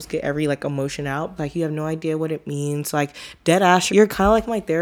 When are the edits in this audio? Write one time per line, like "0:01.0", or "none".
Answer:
0:01.4
0:03.9